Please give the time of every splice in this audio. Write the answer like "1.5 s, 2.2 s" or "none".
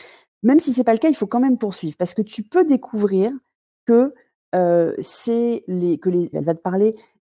6.3 s